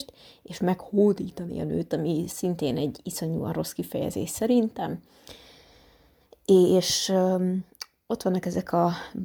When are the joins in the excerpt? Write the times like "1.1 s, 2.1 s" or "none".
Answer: none